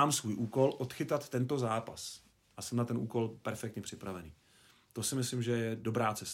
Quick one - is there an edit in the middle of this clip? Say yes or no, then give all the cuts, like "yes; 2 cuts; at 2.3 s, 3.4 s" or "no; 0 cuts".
no; 0 cuts